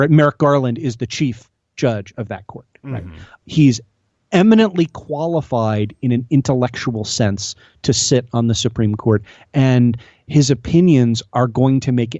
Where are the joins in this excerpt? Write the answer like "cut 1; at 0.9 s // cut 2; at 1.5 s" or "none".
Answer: none